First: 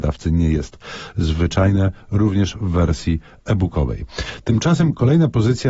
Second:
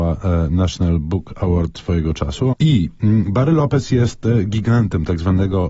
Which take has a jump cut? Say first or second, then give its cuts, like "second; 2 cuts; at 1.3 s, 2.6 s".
second; 1 cut; at 2.5 s